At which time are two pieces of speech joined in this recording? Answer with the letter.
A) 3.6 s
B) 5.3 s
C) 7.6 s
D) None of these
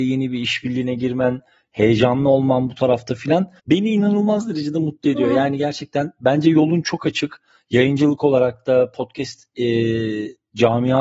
A